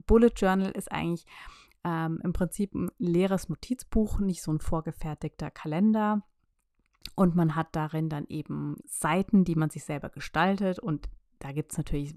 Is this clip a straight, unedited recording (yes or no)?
no